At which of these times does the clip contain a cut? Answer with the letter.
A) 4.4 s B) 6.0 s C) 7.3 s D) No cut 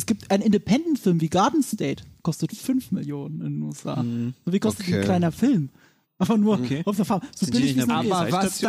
B